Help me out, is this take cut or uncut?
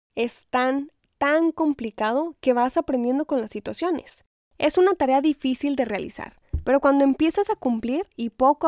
uncut